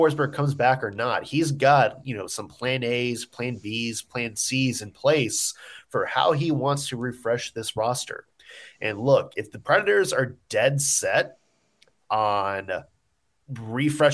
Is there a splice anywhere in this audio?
no; 0 cuts

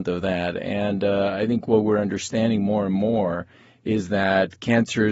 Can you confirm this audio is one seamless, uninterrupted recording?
yes; 0 cuts

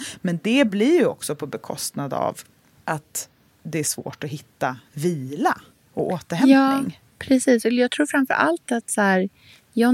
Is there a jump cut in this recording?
no; 0 cuts

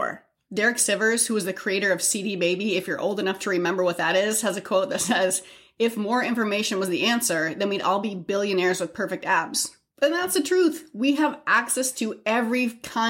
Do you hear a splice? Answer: no; 0 cuts

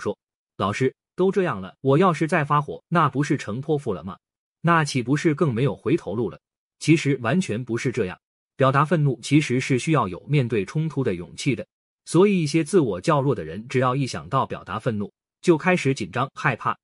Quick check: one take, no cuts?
no; 1 cut; at 4.5 s

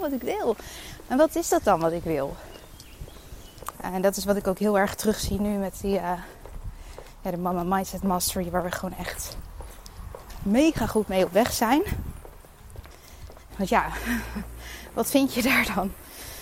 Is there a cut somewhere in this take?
yes; 2 cuts; at 3.7 s, 13.5 s

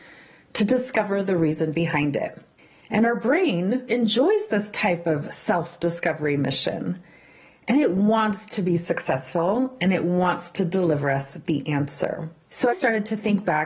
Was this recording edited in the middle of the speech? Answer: yes; 2 cuts; at 3.9 s, 12.7 s

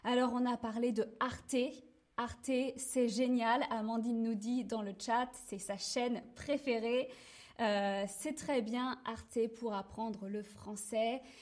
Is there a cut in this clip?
no; 0 cuts

